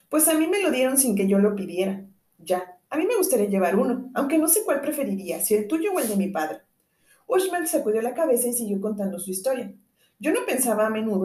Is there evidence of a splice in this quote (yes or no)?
no